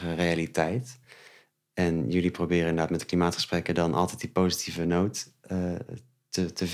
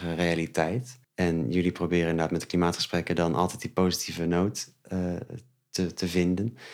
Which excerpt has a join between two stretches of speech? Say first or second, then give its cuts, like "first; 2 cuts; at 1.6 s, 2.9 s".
second; 1 cut; at 1.0 s